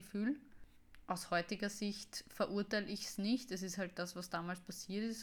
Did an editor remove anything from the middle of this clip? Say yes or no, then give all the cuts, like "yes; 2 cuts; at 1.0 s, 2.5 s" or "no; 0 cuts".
no; 0 cuts